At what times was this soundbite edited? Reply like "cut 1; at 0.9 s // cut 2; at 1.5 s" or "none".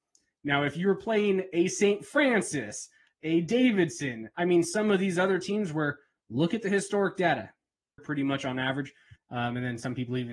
cut 1; at 8.0 s // cut 2; at 9.2 s

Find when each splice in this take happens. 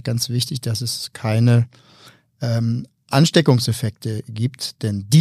none

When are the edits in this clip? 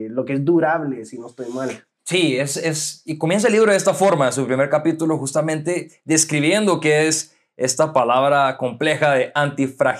none

